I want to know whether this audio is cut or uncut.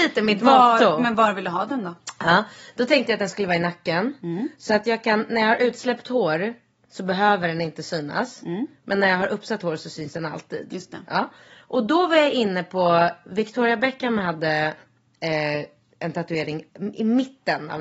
uncut